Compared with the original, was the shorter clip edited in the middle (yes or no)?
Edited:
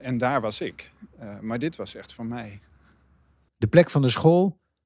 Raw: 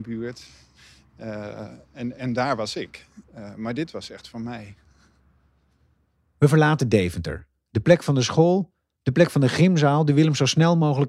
yes